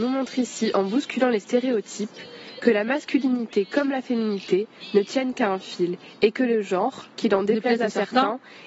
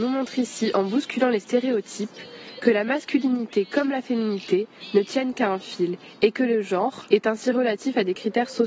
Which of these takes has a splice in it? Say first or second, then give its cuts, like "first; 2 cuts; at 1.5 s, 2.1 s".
second; 1 cut; at 7.1 s